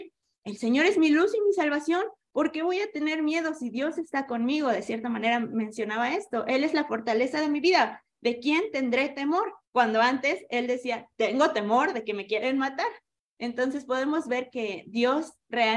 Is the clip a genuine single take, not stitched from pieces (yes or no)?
no